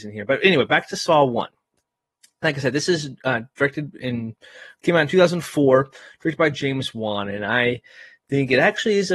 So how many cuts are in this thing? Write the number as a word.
zero